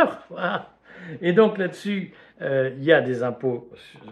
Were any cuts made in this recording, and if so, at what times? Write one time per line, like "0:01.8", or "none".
none